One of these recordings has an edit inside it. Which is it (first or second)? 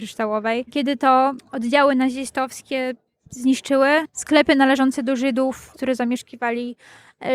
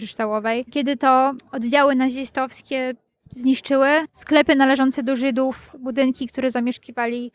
first